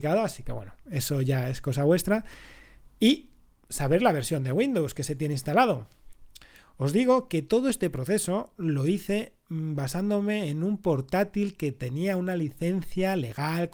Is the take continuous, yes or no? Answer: yes